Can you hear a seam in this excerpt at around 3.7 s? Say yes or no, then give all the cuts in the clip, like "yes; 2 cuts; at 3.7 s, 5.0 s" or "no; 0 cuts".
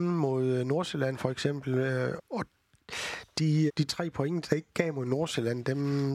yes; 2 cuts; at 2.2 s, 3.7 s